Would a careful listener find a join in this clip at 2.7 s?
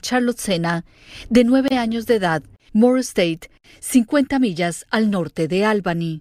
yes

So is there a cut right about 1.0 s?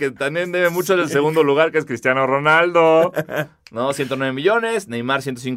no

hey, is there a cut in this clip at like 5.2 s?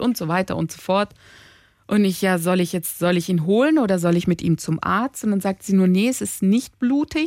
no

